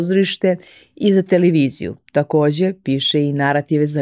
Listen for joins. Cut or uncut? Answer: uncut